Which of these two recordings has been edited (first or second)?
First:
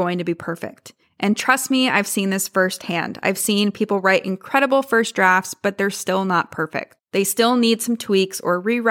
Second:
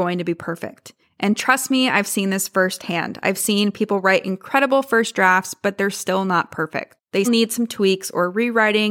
second